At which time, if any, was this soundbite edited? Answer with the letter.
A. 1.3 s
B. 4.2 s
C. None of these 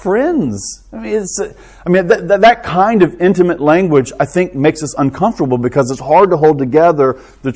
C